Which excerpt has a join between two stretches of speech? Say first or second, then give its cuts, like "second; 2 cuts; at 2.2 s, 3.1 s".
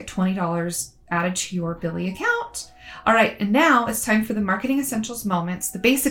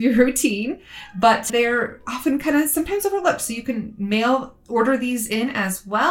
second; 1 cut; at 1.5 s